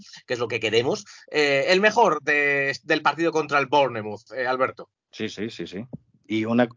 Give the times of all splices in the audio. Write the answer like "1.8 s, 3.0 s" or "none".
5.0 s